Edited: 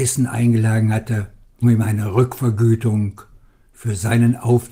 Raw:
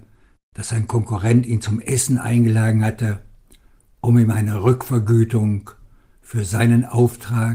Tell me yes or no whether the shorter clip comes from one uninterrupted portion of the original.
no